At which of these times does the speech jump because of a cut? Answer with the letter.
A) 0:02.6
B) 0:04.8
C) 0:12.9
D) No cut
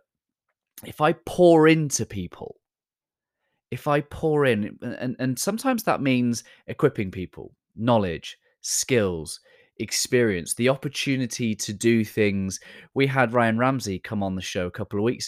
D